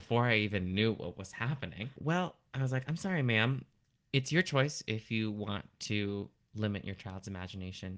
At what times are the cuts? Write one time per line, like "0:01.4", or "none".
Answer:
0:01.9

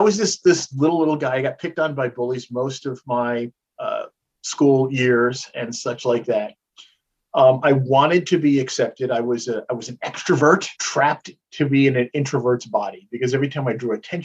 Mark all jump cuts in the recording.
0:10.8

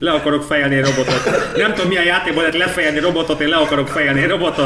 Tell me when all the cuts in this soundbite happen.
none

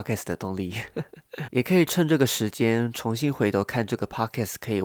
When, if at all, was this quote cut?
0:01.5

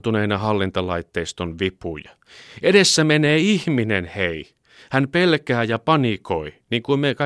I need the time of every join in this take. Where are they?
none

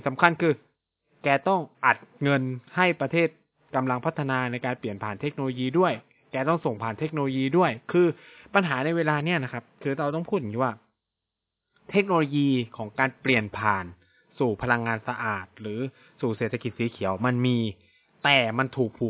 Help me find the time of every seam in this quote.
0:01.7

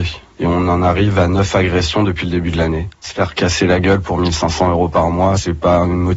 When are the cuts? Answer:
0:02.9

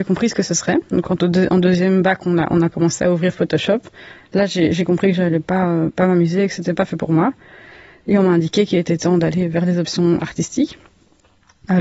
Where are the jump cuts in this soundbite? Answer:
0:06.7

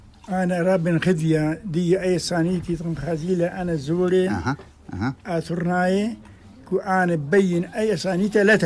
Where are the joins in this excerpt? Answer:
none

